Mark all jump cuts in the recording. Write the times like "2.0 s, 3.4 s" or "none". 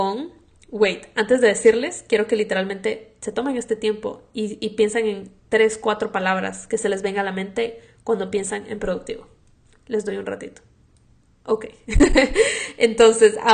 none